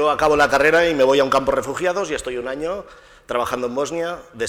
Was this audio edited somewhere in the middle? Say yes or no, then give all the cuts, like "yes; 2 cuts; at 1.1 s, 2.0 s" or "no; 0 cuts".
no; 0 cuts